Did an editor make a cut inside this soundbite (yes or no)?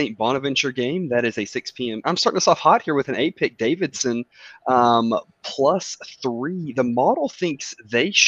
yes